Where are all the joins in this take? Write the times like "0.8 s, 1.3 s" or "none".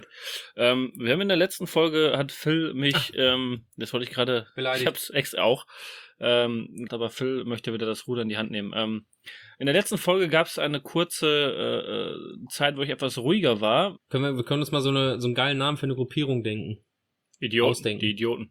6.9 s, 14.0 s